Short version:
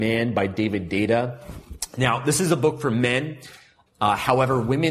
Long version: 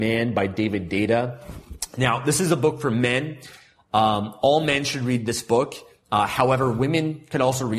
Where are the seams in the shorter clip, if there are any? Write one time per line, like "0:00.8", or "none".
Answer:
0:03.9